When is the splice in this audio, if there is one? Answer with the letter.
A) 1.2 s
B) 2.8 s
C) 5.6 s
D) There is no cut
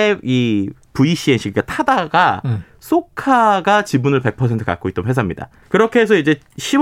C